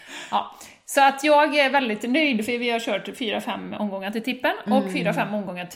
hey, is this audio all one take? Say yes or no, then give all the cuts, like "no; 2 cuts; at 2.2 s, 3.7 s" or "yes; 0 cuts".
yes; 0 cuts